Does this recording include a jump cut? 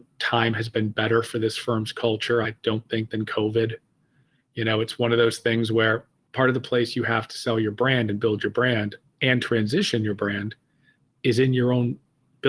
no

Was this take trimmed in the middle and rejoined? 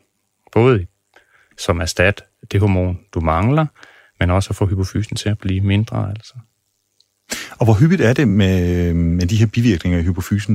no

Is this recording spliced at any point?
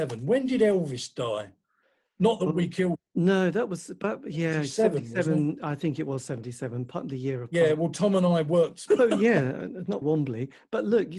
yes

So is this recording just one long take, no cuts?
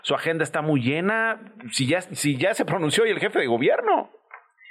yes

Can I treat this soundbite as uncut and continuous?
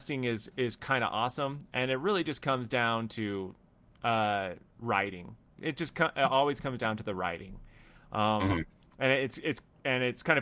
yes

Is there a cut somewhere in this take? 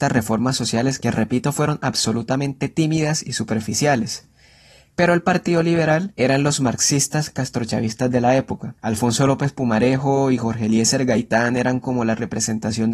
no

